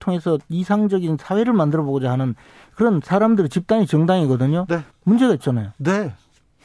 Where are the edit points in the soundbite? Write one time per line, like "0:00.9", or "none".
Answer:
0:04.9